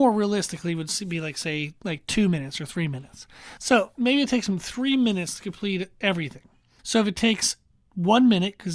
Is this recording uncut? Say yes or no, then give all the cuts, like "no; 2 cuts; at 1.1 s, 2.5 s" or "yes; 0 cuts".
no; 2 cuts; at 3.6 s, 6.8 s